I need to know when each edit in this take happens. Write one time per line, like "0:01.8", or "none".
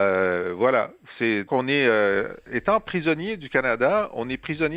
0:01.5